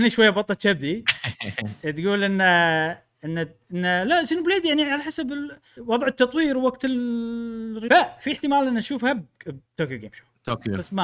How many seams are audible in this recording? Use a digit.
3